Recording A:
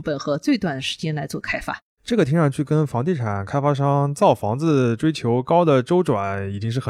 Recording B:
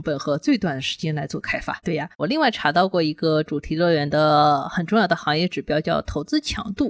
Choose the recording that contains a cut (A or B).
B